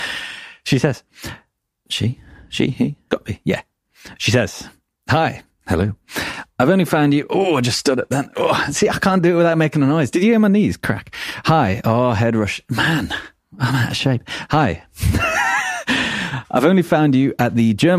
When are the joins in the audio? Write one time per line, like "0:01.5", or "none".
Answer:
0:03.1